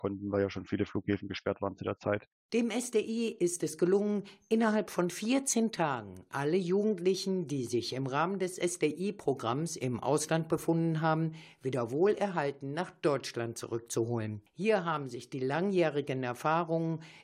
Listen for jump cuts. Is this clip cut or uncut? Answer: uncut